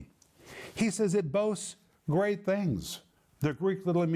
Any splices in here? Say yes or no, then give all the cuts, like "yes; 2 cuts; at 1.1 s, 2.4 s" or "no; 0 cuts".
no; 0 cuts